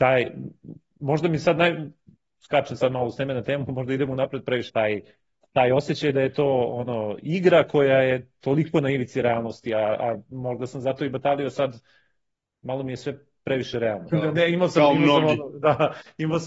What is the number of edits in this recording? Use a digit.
2